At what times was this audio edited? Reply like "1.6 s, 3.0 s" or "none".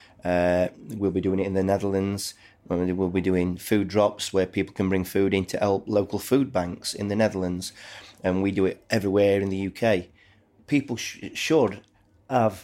10.6 s